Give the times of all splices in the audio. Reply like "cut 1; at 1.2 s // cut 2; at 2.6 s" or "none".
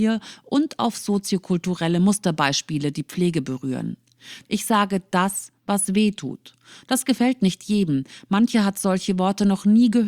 cut 1; at 4.5 s